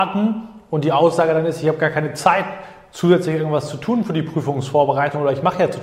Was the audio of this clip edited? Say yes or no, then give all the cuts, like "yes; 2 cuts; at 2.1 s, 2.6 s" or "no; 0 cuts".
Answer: no; 0 cuts